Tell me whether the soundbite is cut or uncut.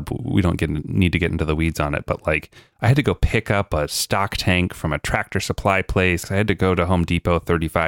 cut